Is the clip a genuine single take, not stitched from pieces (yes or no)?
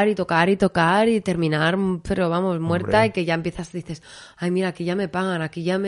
yes